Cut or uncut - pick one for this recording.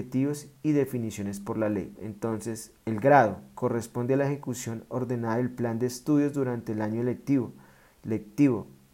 cut